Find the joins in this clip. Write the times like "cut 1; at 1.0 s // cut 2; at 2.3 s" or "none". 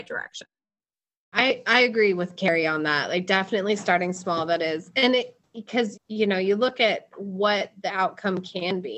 cut 1; at 5.9 s